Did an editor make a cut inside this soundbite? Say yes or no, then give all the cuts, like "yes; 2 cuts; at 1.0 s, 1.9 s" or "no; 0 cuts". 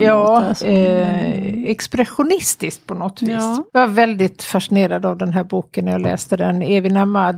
yes; 1 cut; at 3.7 s